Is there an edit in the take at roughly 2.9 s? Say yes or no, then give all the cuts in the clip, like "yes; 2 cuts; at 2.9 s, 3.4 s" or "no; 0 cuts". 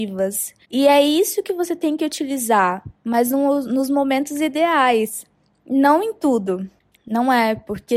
no; 1 cut; at 7.0 s